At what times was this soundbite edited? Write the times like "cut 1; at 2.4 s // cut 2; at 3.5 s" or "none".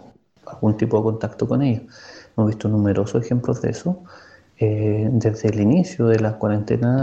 none